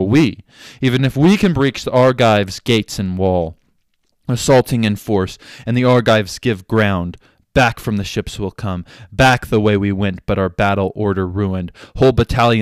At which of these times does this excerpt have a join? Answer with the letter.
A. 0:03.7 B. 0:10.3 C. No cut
C